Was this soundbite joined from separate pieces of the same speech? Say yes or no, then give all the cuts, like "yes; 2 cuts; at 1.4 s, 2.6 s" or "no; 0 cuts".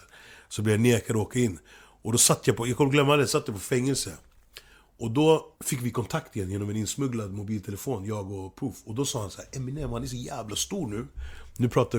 yes; 1 cut; at 5.5 s